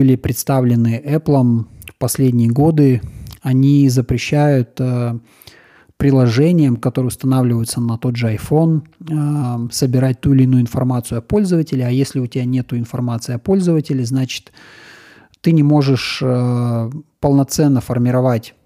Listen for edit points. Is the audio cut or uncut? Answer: uncut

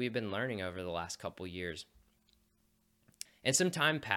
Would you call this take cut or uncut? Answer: cut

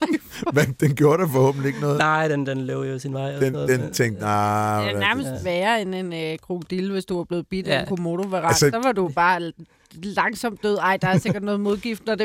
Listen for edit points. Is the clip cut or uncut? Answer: uncut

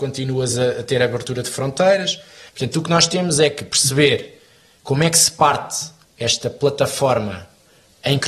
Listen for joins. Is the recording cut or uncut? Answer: cut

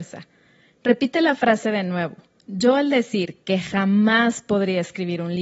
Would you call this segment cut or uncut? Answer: uncut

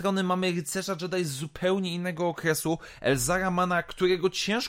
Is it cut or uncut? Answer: uncut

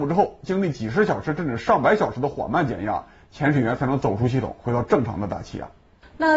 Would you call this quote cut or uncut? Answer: uncut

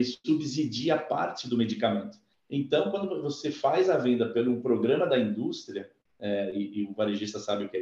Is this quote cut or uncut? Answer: cut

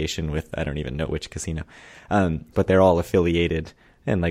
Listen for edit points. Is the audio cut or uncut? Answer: cut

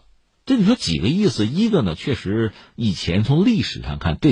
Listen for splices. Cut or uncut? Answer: uncut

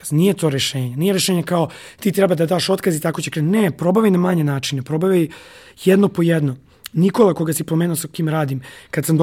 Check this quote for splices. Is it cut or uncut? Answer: uncut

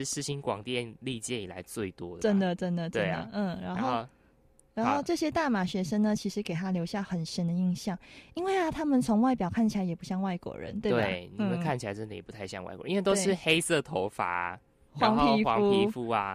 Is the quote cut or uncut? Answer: uncut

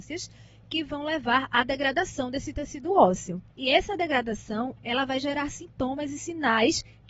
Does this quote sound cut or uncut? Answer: cut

